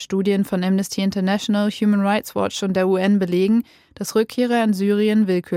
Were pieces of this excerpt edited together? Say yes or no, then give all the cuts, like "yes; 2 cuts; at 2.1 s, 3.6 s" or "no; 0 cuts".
no; 0 cuts